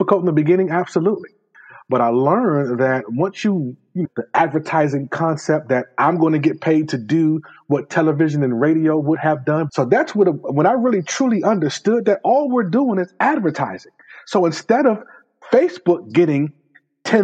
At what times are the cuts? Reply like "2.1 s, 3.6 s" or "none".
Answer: 4.0 s, 9.7 s